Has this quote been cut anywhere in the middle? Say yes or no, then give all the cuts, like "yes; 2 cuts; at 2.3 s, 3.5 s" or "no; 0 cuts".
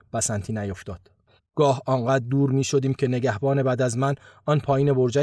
yes; 1 cut; at 1.4 s